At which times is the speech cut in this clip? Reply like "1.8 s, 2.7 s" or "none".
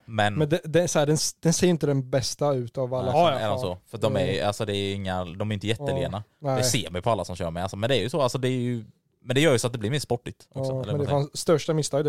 3.1 s